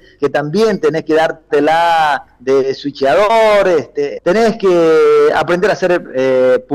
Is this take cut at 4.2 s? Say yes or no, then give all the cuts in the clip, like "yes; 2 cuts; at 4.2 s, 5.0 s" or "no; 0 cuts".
yes; 1 cut; at 4.2 s